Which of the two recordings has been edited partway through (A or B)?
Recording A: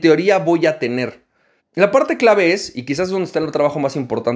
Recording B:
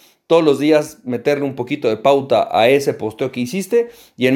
A